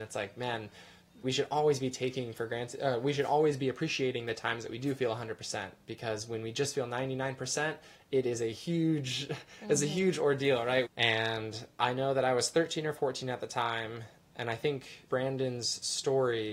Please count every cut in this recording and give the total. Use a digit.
3